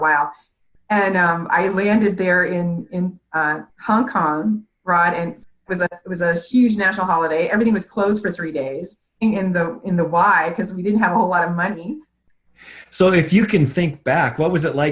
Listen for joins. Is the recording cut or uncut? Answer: cut